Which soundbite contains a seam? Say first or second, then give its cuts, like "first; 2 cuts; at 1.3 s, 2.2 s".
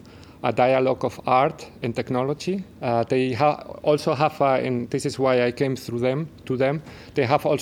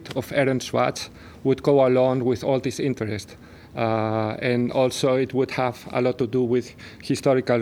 first; 2 cuts; at 2.7 s, 6.4 s